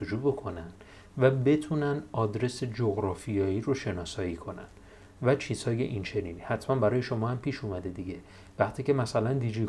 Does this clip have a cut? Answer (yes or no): no